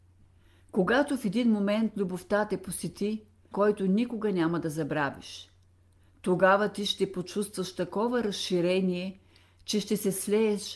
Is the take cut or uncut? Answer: cut